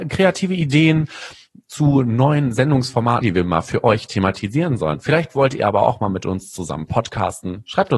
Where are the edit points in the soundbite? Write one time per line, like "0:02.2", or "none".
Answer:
0:03.2

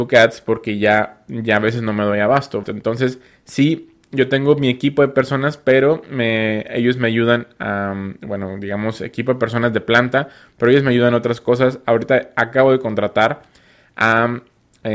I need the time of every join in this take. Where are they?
0:02.6

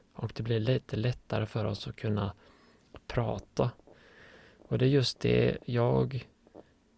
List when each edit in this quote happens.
none

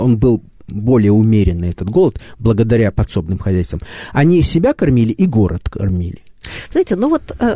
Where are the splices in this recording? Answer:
none

